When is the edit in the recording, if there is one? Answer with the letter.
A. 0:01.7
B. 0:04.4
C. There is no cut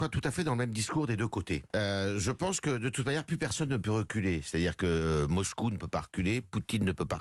A